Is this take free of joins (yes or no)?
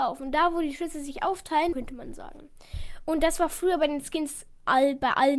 no